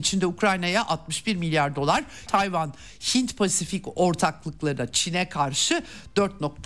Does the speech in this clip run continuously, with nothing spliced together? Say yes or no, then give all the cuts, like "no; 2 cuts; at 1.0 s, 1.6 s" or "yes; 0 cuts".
no; 1 cut; at 2.3 s